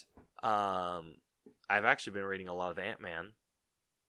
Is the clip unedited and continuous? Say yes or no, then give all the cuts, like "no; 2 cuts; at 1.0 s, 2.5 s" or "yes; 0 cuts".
yes; 0 cuts